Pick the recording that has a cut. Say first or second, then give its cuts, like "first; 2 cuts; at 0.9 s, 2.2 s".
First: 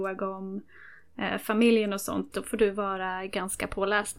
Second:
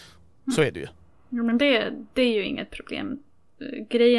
first; 1 cut; at 2.3 s